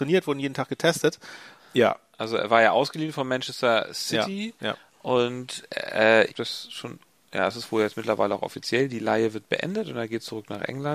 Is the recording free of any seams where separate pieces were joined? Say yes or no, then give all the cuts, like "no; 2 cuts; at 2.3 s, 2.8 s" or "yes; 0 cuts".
no; 2 cuts; at 1.6 s, 6.3 s